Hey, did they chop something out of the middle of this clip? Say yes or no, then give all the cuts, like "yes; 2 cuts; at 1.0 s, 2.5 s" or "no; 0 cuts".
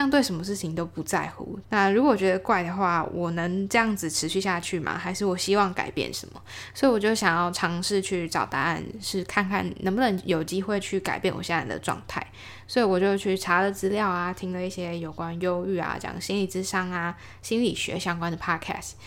yes; 1 cut; at 1.6 s